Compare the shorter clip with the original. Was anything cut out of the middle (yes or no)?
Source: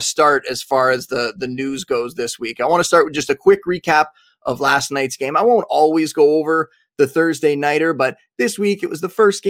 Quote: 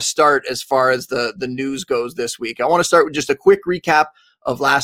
no